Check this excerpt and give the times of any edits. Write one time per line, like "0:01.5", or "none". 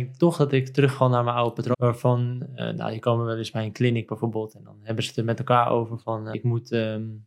0:01.7
0:06.3